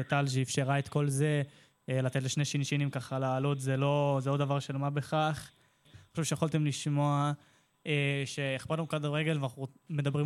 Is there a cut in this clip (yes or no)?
yes